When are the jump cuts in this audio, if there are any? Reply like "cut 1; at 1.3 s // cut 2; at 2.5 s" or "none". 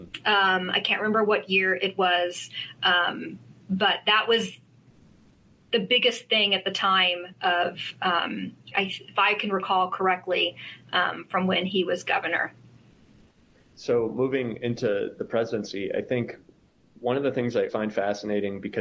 cut 1; at 8.7 s // cut 2; at 17.7 s